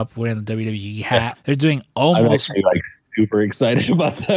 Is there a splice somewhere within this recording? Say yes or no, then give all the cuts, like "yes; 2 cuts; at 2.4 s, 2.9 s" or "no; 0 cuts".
yes; 1 cut; at 1.4 s